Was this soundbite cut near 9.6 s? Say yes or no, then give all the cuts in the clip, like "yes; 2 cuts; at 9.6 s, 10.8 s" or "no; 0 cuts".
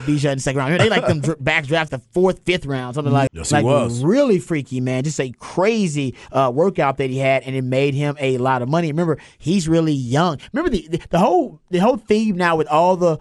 no; 2 cuts; at 1.9 s, 3.3 s